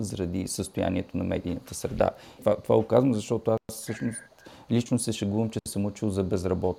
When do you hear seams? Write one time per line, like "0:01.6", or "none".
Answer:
0:02.4